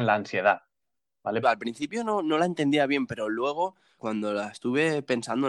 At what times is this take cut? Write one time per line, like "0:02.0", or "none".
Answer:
0:01.4
0:04.0